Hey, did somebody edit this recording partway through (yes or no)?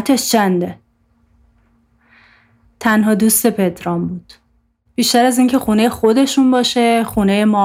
yes